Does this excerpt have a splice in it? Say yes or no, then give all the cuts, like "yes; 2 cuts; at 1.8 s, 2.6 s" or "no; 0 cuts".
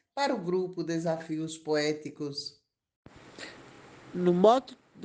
no; 0 cuts